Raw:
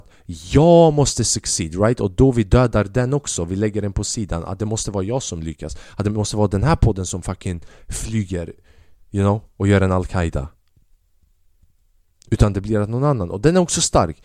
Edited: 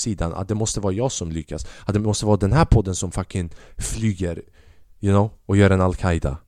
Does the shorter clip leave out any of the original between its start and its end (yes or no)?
no